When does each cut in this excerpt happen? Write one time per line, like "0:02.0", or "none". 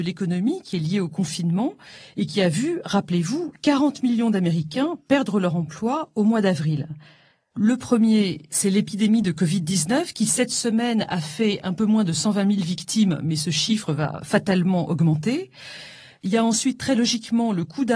0:07.5